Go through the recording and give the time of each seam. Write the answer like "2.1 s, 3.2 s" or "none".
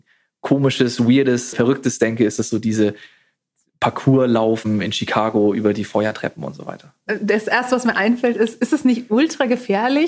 1.5 s